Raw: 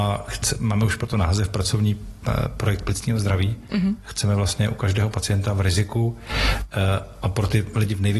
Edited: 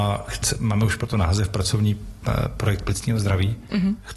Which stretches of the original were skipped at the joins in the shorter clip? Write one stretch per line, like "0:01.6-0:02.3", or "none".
none